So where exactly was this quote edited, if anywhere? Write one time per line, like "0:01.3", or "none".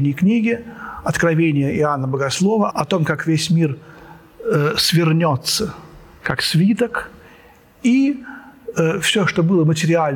0:02.7